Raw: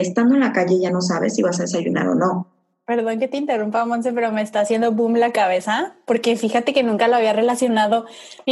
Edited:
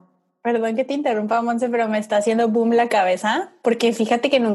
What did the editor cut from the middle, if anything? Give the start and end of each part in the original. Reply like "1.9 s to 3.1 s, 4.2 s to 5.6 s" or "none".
none